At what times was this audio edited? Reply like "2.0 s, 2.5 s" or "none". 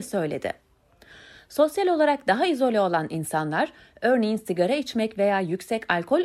none